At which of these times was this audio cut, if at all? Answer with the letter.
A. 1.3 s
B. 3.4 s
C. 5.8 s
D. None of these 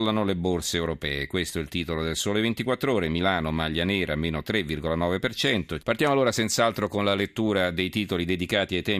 C